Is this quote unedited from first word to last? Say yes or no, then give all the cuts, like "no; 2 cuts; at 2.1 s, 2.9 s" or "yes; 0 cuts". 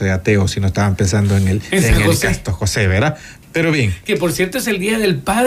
no; 1 cut; at 3.4 s